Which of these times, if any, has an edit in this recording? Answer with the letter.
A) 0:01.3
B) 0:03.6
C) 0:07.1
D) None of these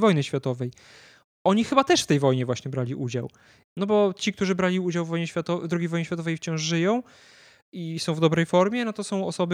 B